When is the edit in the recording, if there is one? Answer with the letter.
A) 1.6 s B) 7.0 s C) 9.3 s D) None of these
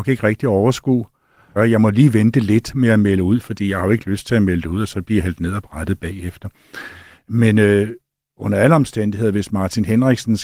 A